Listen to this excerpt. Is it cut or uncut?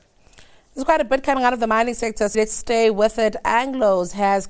cut